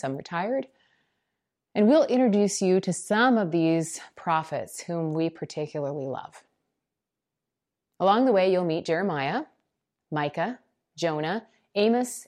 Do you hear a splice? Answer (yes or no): yes